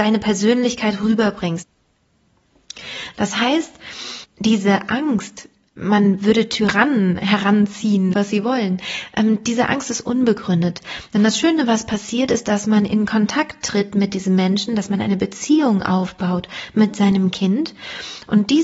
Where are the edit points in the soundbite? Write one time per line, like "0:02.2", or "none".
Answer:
0:03.1
0:08.1